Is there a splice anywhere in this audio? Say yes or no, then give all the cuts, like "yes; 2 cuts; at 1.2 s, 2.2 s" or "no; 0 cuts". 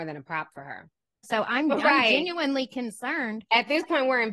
yes; 1 cut; at 1.2 s